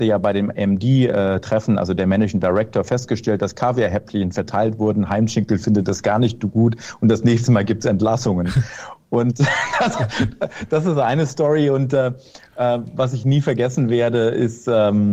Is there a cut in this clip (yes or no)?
no